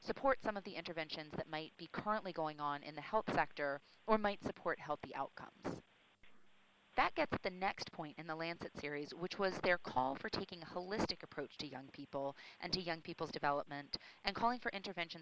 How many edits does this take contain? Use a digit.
1